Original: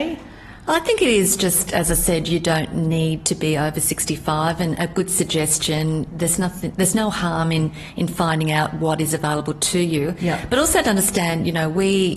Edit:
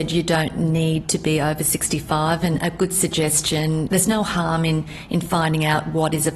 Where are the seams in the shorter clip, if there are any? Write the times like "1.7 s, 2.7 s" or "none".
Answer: 3.9 s